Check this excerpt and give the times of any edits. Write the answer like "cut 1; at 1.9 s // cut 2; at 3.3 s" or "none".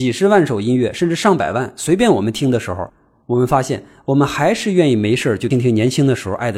cut 1; at 5.5 s